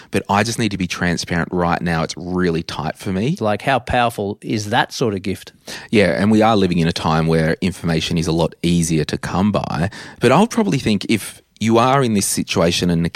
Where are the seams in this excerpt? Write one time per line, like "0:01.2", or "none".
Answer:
0:03.4